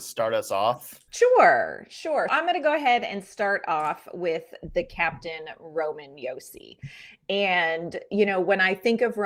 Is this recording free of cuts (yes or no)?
no